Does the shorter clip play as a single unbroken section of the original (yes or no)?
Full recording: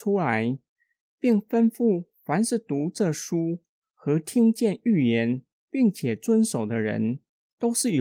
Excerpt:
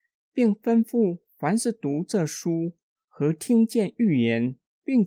yes